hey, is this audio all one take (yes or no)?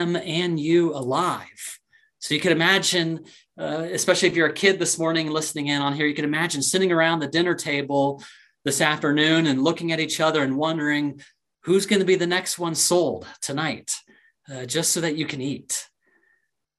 yes